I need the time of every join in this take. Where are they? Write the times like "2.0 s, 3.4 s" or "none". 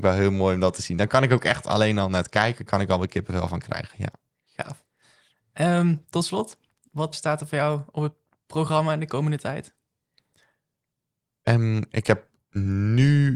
7.1 s